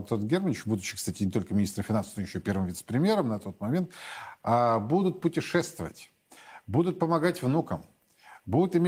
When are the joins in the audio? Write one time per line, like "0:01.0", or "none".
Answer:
none